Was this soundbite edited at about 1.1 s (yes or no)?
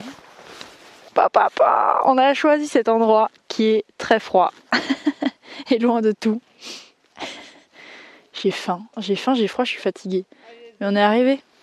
yes